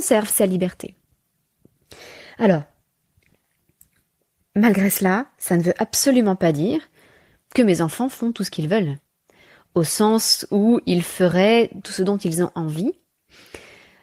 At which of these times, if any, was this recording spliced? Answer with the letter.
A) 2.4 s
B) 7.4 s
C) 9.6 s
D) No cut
D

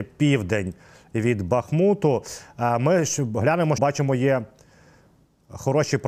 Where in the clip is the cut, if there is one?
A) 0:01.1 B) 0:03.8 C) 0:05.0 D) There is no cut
B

